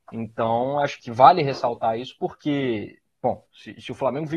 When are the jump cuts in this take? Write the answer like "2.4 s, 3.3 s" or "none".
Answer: 1.0 s